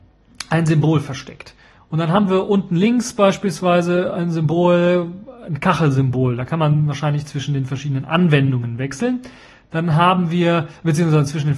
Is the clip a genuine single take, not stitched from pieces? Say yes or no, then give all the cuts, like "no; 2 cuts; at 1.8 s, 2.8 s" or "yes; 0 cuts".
yes; 0 cuts